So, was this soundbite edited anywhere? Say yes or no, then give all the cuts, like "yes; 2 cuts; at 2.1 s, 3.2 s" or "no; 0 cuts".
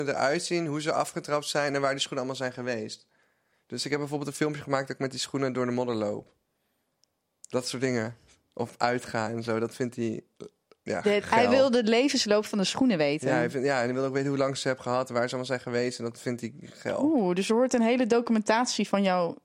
no; 0 cuts